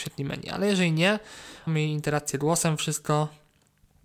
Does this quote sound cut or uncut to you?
cut